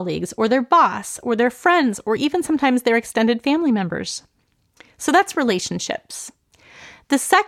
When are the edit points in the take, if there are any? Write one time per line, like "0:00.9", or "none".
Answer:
none